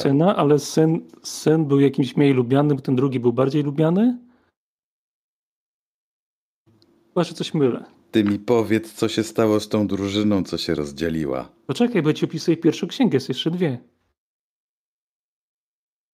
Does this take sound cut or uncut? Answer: cut